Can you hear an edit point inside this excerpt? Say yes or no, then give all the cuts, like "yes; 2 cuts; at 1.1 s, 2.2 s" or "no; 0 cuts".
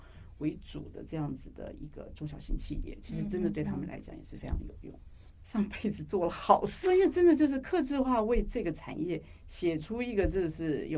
yes; 2 cuts; at 5.4 s, 6.8 s